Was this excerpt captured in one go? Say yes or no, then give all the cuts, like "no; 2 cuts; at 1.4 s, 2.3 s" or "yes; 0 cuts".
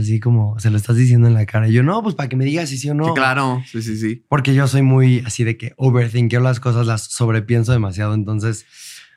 yes; 0 cuts